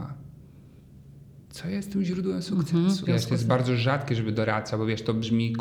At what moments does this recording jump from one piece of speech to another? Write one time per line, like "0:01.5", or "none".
0:01.5
0:03.0